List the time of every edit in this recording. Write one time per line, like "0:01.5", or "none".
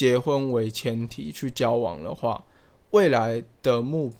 none